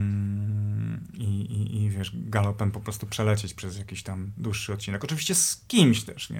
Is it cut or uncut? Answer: uncut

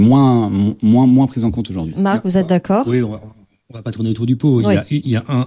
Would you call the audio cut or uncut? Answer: uncut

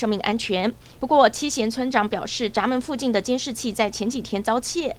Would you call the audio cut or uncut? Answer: cut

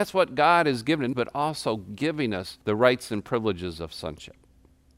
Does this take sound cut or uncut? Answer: cut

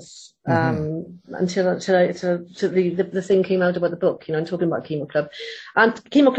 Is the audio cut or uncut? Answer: uncut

